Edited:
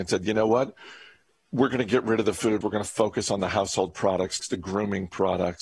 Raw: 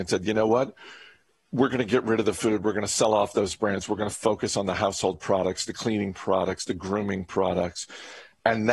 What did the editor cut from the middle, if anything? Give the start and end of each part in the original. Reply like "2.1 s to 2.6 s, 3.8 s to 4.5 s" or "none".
2.6 s to 3.9 s, 5.7 s to 6.6 s